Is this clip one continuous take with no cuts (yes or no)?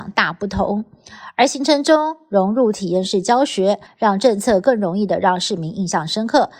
no